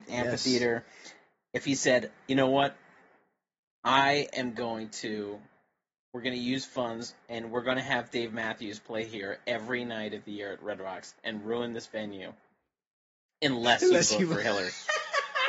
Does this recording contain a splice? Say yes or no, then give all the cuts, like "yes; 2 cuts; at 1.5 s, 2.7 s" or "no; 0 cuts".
no; 0 cuts